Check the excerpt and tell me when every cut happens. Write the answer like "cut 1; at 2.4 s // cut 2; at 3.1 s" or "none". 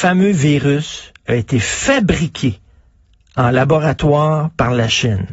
none